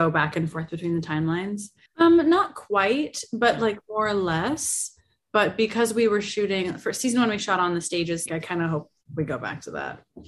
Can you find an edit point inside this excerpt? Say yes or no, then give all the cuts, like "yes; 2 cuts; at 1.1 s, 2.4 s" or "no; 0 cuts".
yes; 2 cuts; at 1.9 s, 8.3 s